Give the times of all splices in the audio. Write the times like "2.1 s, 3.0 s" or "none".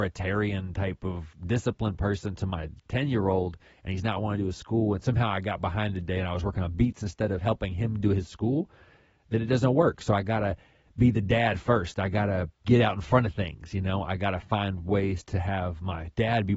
1.3 s